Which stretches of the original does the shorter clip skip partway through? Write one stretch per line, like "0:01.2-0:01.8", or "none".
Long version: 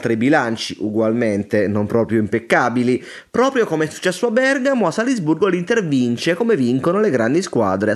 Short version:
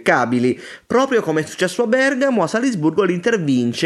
none